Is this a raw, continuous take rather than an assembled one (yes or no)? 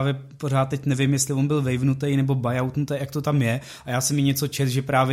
yes